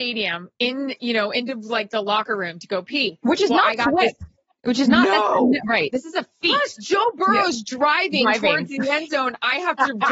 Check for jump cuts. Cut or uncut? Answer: uncut